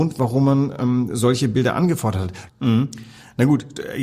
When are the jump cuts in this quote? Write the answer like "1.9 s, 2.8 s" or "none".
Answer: 2.5 s